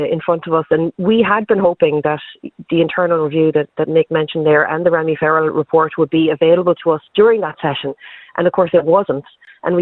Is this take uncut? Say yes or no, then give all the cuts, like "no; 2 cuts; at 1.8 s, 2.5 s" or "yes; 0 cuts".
no; 1 cut; at 7.1 s